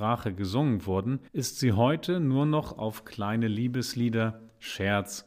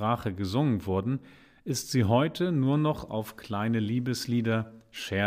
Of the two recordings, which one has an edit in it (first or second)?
first